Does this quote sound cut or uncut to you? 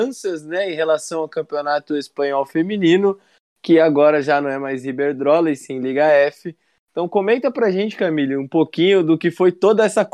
uncut